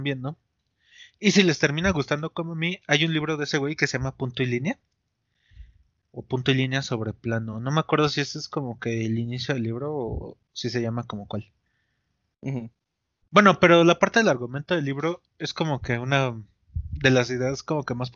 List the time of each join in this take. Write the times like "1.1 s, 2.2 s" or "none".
none